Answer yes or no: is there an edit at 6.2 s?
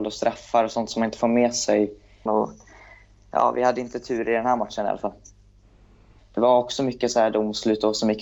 yes